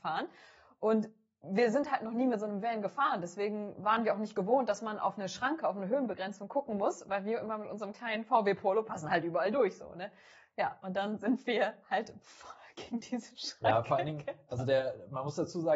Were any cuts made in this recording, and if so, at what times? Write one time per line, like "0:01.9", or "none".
none